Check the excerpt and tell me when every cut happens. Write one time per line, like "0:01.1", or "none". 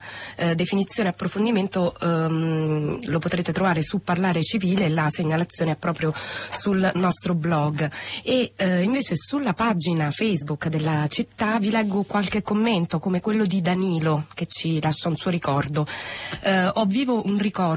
none

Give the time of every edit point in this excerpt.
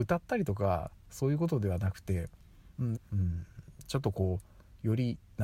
0:03.0

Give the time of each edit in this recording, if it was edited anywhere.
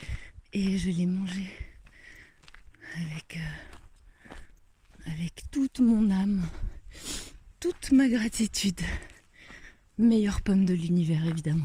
0:05.5

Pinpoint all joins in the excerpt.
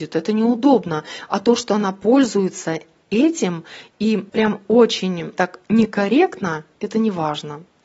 0:04.3
0:05.3

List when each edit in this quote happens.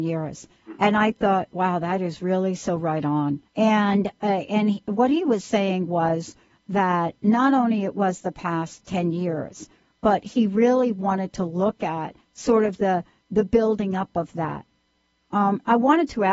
0:03.5

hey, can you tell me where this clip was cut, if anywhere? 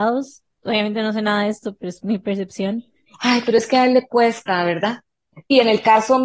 0:03.1

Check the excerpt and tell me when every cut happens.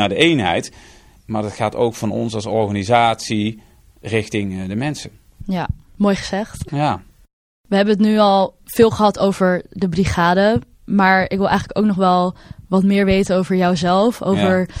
0:01.2

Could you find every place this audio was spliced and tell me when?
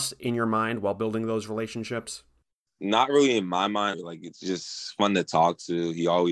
0:03.9

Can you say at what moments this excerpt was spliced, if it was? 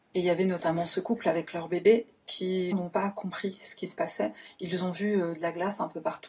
0:02.7

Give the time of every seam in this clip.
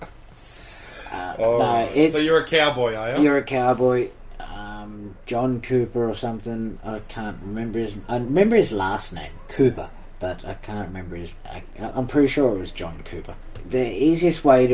none

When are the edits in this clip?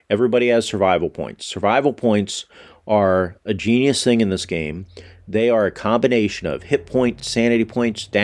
none

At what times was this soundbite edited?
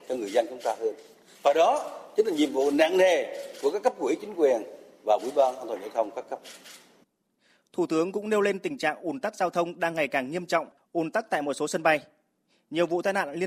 0:10.8

